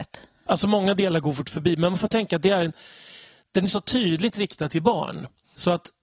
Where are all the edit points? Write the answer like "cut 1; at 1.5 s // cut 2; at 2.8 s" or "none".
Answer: none